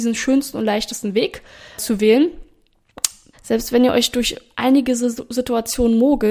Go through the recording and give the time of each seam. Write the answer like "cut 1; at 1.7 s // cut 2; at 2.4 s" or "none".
cut 1; at 1.8 s // cut 2; at 3.3 s